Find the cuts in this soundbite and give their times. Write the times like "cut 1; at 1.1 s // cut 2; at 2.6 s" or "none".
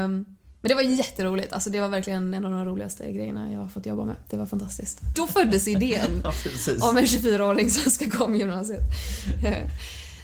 cut 1; at 5.1 s

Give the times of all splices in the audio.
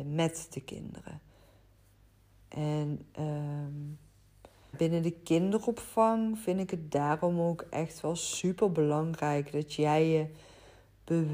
cut 1; at 4.7 s

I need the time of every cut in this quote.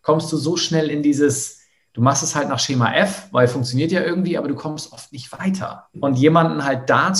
cut 1; at 5.9 s

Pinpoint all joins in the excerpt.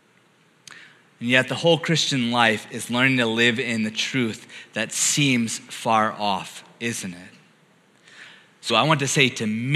cut 1; at 8.7 s

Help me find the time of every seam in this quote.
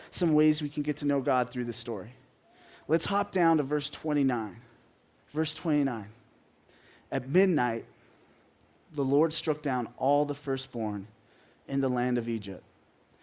cut 1; at 5.2 s

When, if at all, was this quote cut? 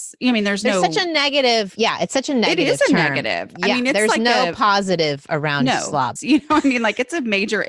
cut 1; at 6.2 s

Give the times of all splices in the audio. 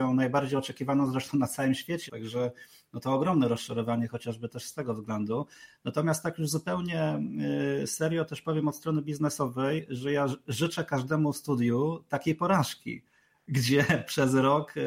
cut 1; at 2.1 s

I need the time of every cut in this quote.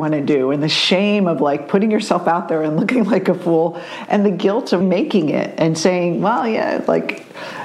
cut 1; at 4.8 s

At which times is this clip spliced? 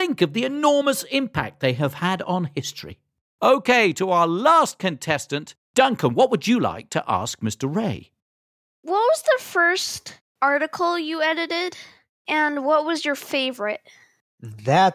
none

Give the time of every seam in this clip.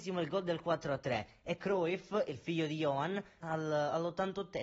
cut 1; at 3.4 s

